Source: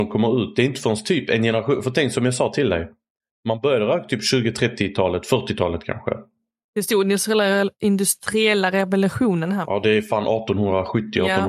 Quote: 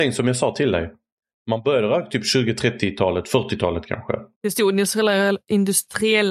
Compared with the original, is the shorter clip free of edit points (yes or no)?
no